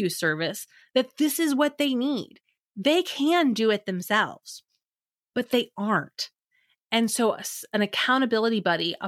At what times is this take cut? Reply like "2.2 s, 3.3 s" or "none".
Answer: none